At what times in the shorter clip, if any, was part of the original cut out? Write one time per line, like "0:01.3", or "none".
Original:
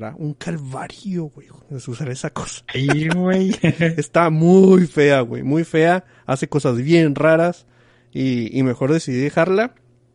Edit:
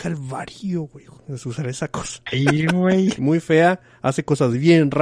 0:03.2